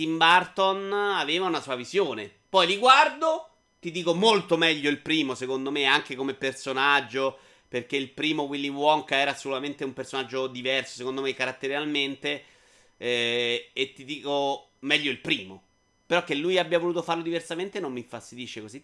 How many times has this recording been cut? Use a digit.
0